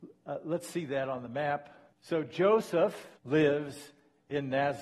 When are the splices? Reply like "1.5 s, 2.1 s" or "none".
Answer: 1.9 s, 3.2 s